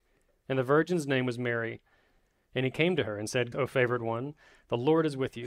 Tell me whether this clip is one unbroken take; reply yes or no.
no